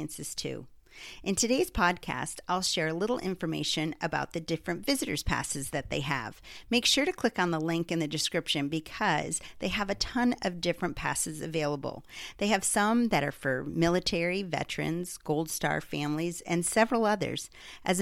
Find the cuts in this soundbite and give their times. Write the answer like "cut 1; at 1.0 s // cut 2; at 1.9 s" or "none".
none